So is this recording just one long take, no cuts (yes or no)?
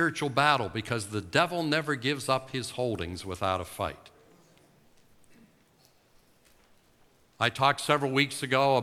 yes